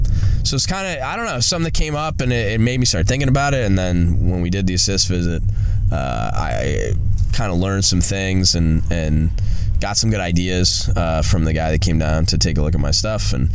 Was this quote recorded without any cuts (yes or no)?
yes